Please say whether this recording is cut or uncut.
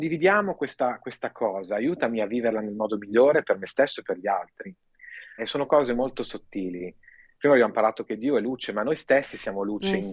cut